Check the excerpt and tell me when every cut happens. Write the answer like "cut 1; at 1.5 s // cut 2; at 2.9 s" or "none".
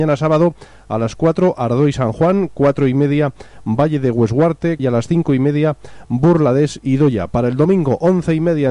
cut 1; at 4.8 s